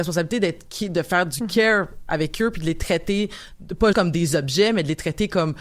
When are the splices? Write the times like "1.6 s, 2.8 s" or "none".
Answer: 3.9 s